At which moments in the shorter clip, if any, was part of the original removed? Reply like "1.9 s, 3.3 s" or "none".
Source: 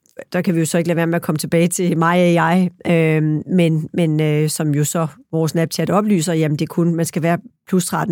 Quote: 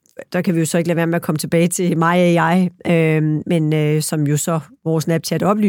3.4 s